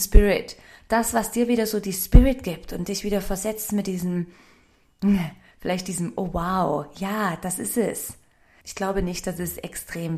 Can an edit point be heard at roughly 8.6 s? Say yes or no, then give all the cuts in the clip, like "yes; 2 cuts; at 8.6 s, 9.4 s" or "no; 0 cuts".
yes; 1 cut; at 8.6 s